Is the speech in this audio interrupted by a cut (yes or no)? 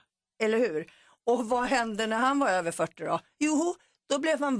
no